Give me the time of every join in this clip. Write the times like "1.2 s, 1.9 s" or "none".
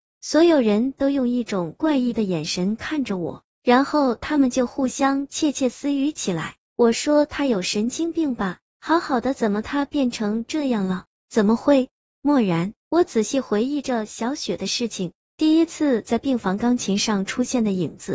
11.2 s, 12.8 s, 15.2 s